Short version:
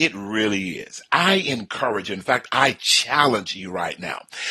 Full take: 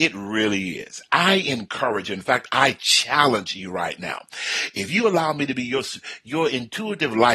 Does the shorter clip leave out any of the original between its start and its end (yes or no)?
no